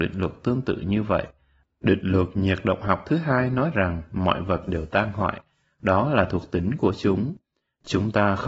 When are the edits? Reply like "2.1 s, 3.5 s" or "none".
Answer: none